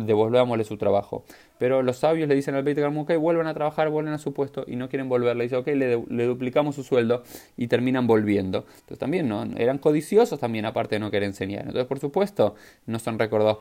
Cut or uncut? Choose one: uncut